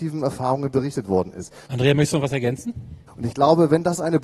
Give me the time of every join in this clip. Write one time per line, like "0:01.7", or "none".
0:01.7
0:03.1